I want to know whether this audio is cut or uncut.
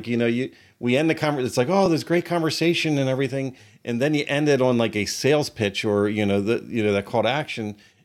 uncut